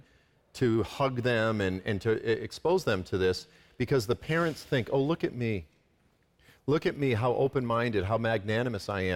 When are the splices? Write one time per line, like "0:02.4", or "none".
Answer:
none